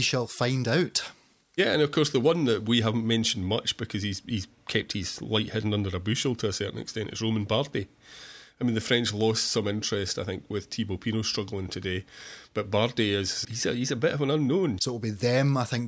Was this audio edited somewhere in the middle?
yes; 2 cuts; at 13.4 s, 14.8 s

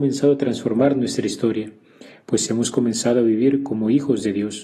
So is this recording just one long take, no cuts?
yes; 0 cuts

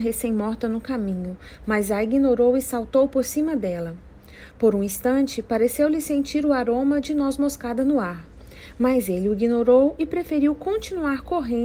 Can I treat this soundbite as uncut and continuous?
yes; 0 cuts

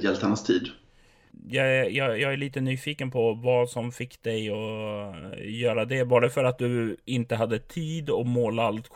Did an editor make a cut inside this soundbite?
no; 0 cuts

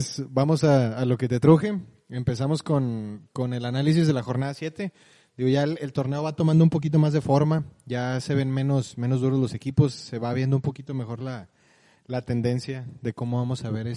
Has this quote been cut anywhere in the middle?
no; 0 cuts

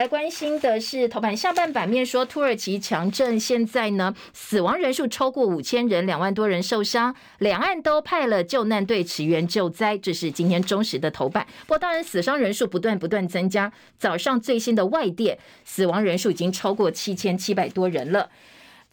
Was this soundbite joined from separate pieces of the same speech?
no; 0 cuts

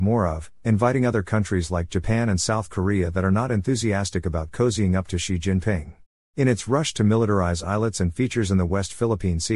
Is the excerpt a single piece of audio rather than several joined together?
no; 1 cut; at 6.2 s

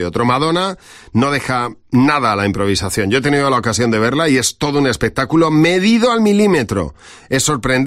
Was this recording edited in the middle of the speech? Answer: no; 0 cuts

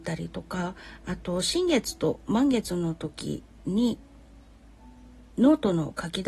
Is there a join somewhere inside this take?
yes; 1 cut; at 5.3 s

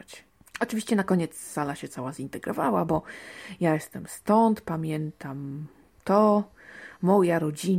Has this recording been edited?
no; 0 cuts

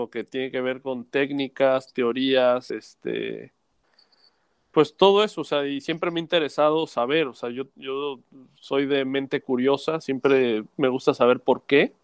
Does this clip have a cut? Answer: no; 0 cuts

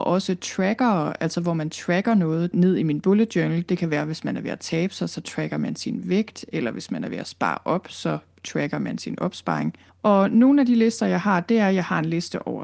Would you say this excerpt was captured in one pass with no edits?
no; 3 cuts; at 2.5 s, 3.7 s, 9.9 s

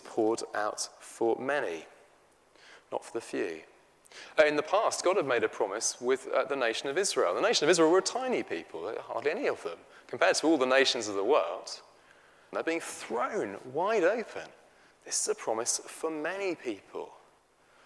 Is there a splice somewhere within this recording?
yes; 2 cuts; at 12.5 s, 14.9 s

